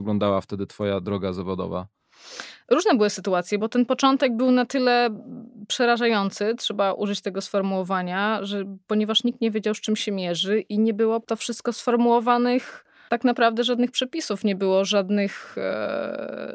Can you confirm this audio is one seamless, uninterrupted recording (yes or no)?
yes